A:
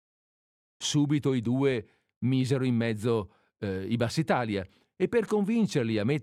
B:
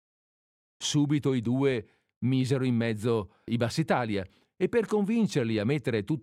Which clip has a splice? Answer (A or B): B